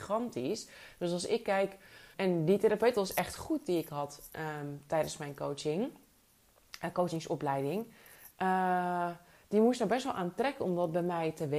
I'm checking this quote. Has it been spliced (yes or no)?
yes